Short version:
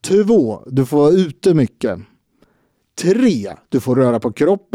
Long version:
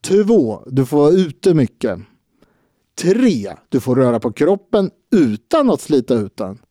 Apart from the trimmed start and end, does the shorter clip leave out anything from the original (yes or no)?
no